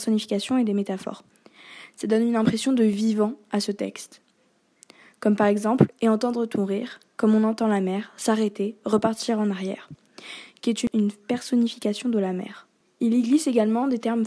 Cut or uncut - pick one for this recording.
uncut